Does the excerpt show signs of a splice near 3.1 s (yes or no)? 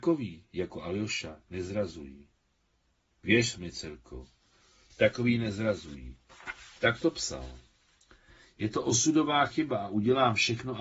yes